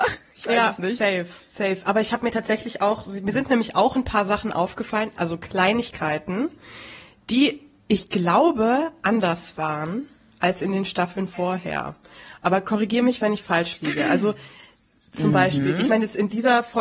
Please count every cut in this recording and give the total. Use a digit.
0